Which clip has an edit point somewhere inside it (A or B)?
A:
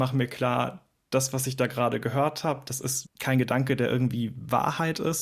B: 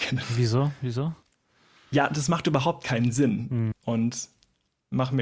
B